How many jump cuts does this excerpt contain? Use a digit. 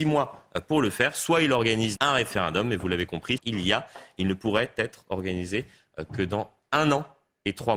2